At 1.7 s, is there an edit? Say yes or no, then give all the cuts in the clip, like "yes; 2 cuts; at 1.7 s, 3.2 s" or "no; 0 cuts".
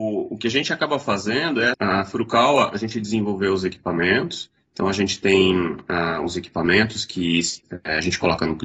yes; 1 cut; at 1.7 s